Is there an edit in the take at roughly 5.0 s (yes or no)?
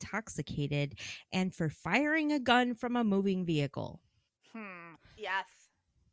yes